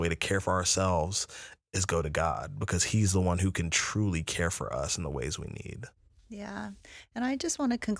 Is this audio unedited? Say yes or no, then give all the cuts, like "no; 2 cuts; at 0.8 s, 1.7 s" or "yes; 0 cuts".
yes; 0 cuts